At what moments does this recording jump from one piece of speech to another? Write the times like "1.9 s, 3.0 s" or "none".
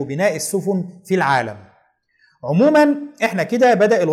none